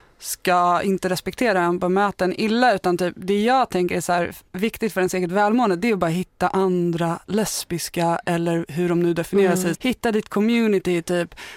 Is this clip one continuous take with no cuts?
no; 2 cuts; at 4.5 s, 9.7 s

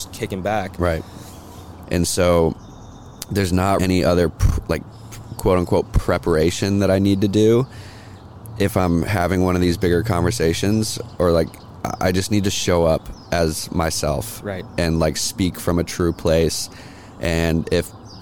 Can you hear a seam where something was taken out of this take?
yes; 2 cuts; at 1.8 s, 3.8 s

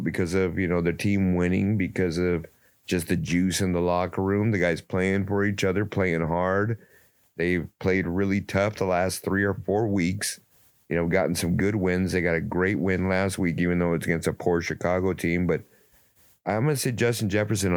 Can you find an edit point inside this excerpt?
no; 0 cuts

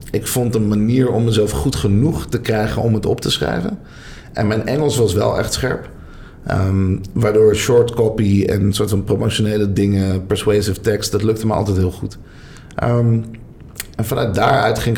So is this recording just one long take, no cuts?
yes; 0 cuts

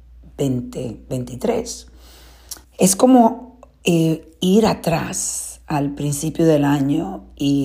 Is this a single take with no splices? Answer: no; 1 cut; at 2.6 s

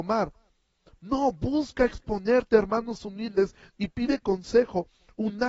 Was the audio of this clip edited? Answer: no; 0 cuts

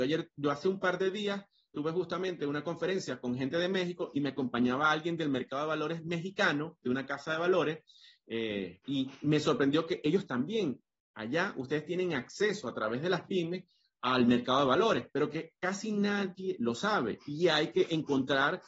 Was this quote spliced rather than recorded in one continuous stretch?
yes; 1 cut; at 8.8 s

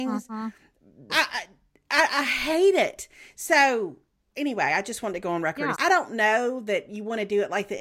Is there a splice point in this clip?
yes; 2 cuts; at 1.1 s, 5.7 s

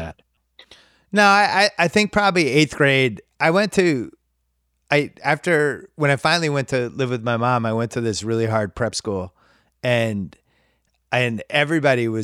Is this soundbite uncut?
yes; 0 cuts

